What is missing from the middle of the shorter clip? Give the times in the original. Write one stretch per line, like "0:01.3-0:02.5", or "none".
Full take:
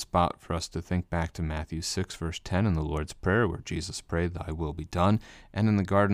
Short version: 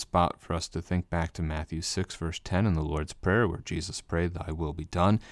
none